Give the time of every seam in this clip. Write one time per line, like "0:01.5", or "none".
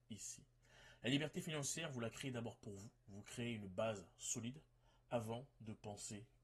none